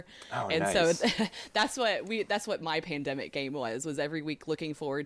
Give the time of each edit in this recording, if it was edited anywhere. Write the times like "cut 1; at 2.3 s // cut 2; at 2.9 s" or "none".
none